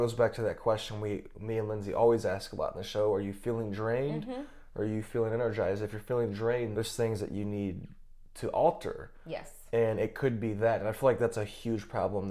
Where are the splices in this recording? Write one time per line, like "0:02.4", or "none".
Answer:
0:06.7